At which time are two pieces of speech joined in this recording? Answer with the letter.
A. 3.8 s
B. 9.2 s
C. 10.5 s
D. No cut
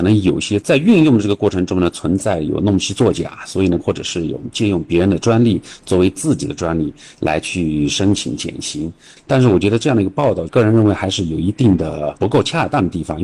A